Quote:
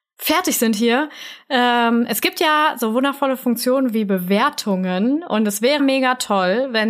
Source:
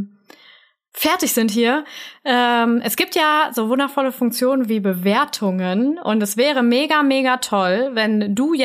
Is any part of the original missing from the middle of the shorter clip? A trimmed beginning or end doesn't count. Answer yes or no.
yes